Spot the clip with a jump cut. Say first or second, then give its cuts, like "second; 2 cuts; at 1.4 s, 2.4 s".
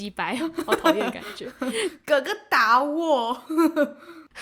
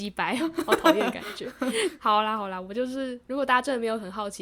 second; 1 cut; at 2.0 s